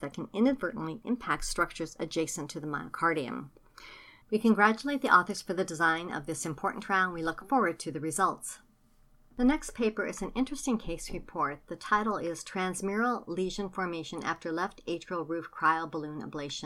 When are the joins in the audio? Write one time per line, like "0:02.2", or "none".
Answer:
0:04.2